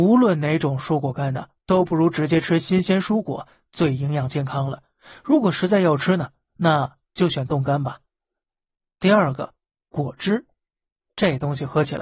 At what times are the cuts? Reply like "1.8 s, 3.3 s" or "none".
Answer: none

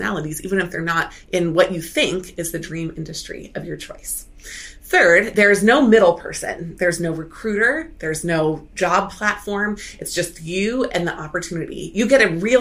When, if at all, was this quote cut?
none

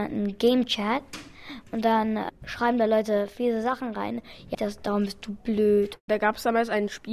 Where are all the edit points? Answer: 4.5 s

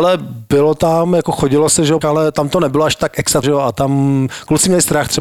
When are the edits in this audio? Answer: 2.0 s, 3.4 s

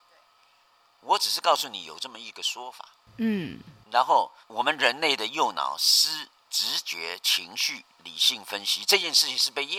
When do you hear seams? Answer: 4.4 s, 7.9 s

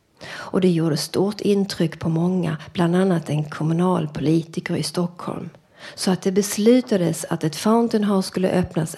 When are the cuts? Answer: none

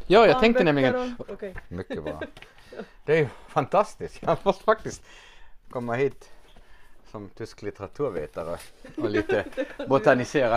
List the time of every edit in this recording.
1.2 s

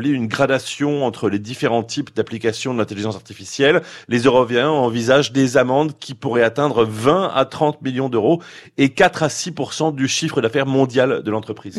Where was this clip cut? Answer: 4.0 s

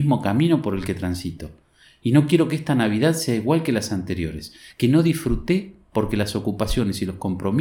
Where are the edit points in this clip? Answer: 4.7 s

